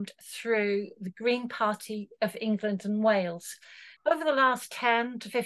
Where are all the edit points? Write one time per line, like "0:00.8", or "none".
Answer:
0:04.0

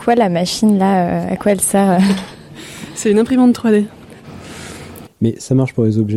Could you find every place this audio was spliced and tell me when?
0:05.1

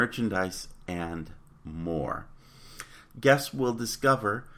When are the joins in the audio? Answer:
0:03.1

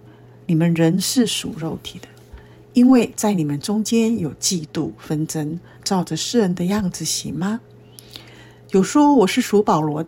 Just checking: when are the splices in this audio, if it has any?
0:05.7

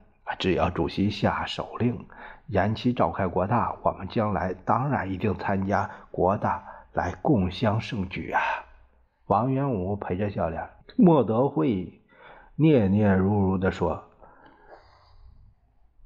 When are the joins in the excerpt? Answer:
0:10.8

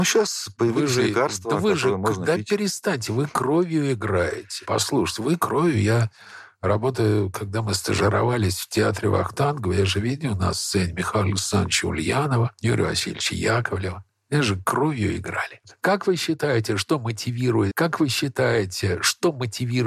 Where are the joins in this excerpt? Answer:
0:17.7

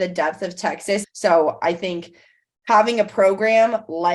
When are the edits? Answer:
0:01.0

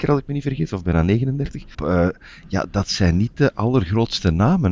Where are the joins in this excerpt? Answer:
0:01.7

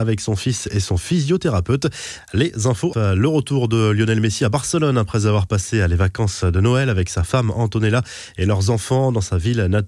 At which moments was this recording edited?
0:02.9

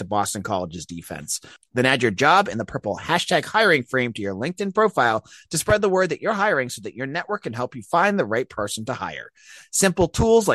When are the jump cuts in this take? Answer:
0:01.6

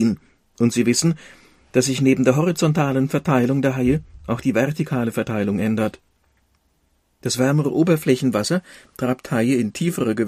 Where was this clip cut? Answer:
none

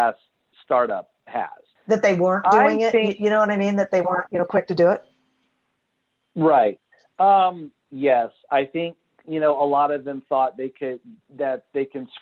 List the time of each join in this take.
0:01.8
0:07.8

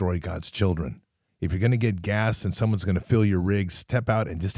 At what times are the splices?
0:01.3

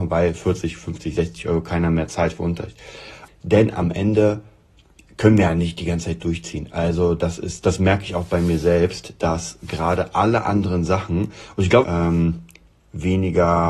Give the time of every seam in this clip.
0:03.3
0:11.8

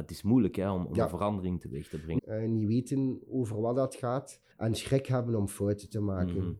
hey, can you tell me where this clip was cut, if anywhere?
0:02.2
0:04.5

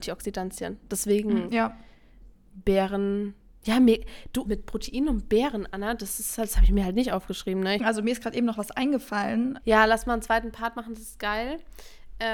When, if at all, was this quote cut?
0:04.4
0:07.8
0:09.6

